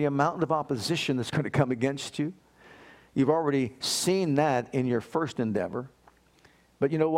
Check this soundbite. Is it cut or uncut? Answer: uncut